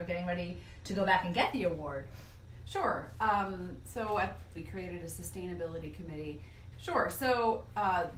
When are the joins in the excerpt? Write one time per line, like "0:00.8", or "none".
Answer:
0:04.5
0:06.7

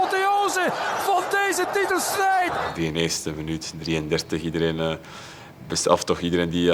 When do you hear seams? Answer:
none

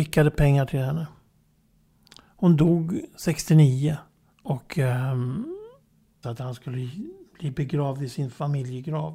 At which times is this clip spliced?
0:04.3
0:06.2

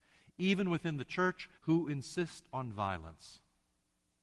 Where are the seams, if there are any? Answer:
0:01.5

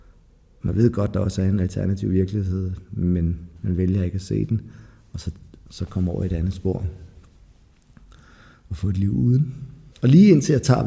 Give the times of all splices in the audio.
0:09.9

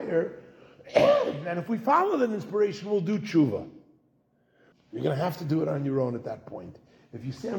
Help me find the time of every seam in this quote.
0:04.7

